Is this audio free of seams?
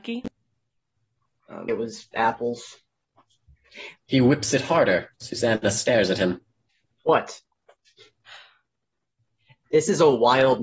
no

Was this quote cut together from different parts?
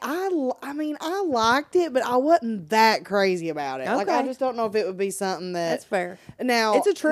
no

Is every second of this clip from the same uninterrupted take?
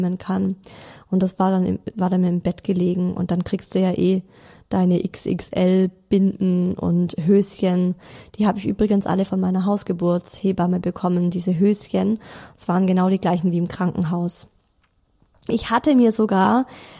yes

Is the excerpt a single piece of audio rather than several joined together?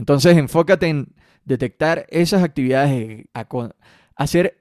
no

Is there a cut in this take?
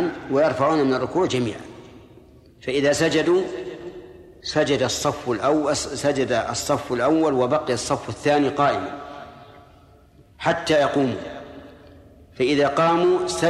no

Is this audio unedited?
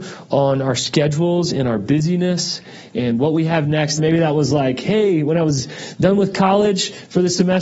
no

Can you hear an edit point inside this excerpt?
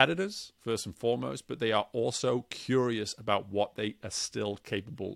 no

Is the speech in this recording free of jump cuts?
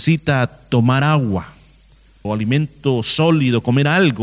no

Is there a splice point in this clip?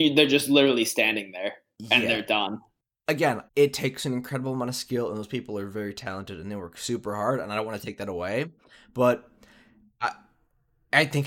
yes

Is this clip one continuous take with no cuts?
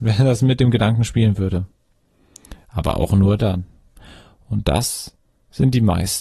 no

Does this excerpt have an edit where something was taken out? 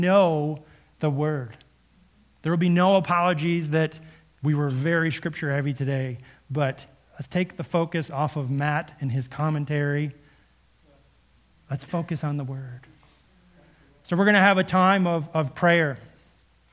no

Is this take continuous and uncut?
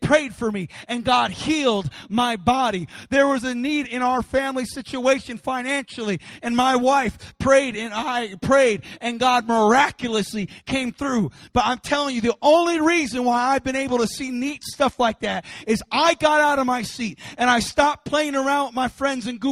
yes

